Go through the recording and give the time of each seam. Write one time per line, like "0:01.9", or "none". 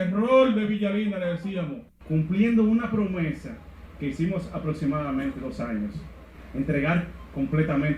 0:01.9